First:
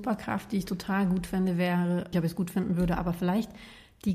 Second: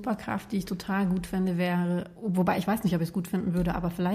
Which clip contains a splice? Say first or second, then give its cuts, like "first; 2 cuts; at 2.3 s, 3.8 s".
first; 1 cut; at 2.1 s